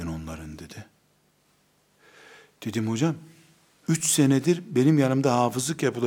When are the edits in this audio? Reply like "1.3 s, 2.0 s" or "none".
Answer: none